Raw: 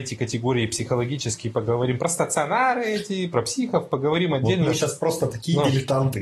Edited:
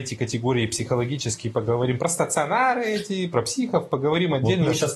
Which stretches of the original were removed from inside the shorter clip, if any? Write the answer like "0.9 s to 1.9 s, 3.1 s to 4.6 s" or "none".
none